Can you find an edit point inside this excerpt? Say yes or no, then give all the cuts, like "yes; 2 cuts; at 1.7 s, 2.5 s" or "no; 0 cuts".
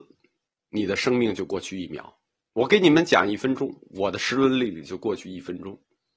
no; 0 cuts